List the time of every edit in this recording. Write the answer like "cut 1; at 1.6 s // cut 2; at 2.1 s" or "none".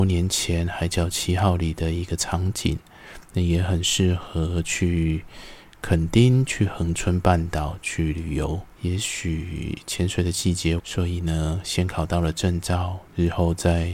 cut 1; at 8.8 s // cut 2; at 10.8 s

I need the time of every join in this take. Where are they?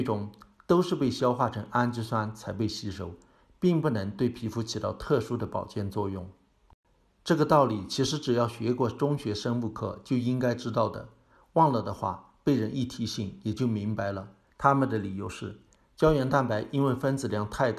cut 1; at 14.5 s

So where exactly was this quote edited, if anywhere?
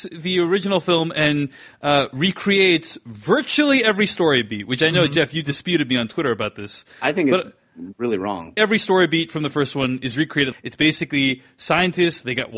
cut 1; at 8.6 s // cut 2; at 10.5 s

